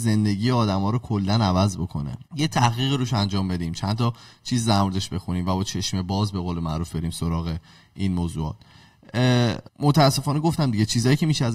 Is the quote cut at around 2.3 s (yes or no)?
yes